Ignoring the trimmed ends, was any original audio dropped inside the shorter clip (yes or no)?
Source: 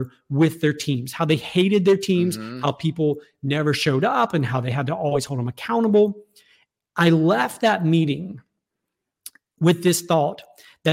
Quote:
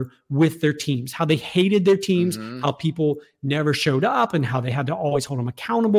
no